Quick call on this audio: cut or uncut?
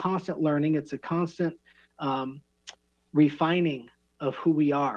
uncut